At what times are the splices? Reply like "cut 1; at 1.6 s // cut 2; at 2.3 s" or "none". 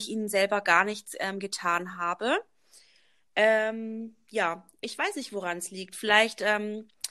none